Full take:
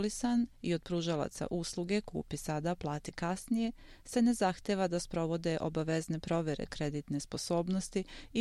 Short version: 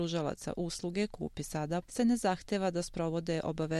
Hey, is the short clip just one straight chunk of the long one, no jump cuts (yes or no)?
no